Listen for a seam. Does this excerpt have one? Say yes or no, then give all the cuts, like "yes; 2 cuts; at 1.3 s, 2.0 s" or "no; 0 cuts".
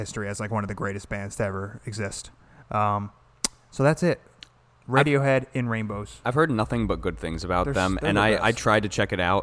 no; 0 cuts